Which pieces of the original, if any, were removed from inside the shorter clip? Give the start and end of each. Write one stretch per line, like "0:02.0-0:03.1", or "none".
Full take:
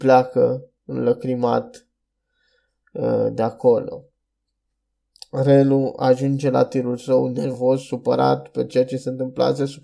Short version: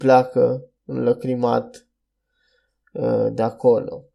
none